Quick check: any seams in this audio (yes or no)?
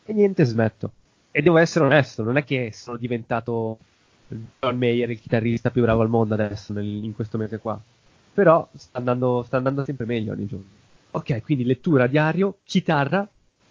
yes